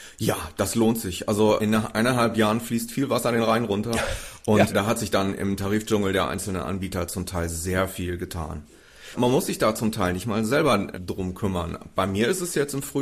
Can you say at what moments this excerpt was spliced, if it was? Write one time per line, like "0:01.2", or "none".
none